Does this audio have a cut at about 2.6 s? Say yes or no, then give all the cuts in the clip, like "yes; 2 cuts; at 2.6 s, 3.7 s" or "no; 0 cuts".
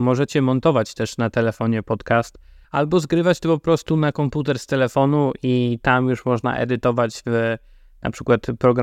yes; 1 cut; at 2.6 s